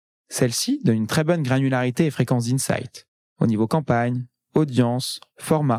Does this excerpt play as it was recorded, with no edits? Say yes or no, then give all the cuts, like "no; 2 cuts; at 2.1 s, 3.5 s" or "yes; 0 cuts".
yes; 0 cuts